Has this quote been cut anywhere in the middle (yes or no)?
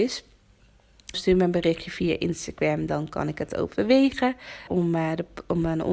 yes